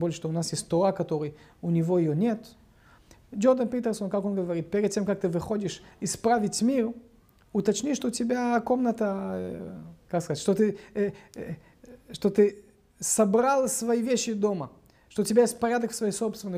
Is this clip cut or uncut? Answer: uncut